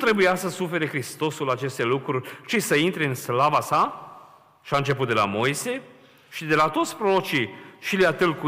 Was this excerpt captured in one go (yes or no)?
yes